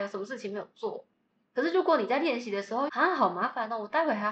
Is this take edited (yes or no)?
yes